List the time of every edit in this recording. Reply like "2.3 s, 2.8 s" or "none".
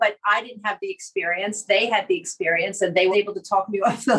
3.1 s

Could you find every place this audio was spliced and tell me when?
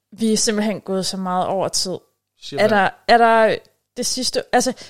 none

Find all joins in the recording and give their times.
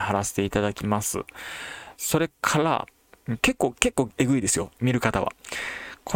2.0 s, 4.8 s

